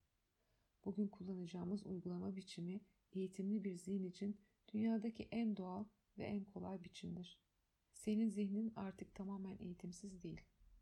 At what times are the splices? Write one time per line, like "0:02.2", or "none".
0:07.9